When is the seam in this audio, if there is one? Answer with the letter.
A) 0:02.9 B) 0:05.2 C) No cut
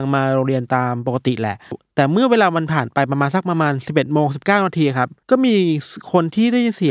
B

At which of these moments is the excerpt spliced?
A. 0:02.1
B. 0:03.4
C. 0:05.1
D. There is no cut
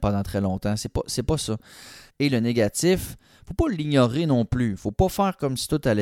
A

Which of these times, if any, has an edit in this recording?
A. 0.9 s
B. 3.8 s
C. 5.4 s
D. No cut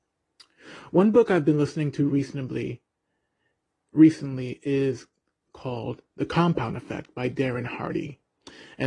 D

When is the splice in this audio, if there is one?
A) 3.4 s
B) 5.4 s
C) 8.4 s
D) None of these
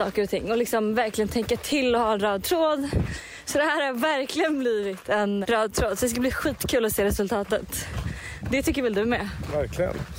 B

